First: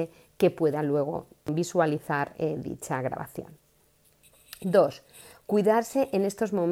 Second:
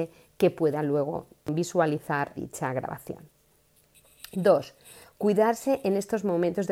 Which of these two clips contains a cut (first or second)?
second